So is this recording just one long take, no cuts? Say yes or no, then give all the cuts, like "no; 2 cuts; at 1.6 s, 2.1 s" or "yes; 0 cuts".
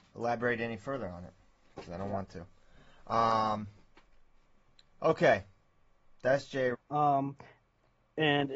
no; 1 cut; at 6.7 s